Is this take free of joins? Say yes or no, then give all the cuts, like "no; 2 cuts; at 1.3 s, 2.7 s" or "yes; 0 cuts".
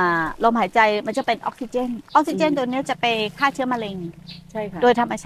no; 1 cut; at 2.1 s